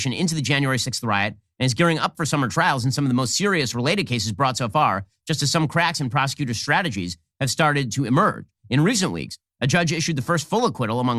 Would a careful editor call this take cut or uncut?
uncut